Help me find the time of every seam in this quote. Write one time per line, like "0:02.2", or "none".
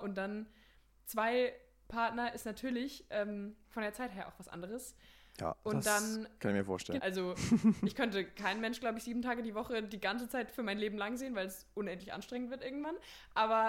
0:07.0